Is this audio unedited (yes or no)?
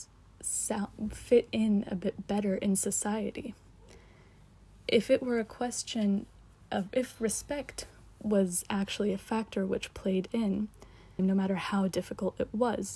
no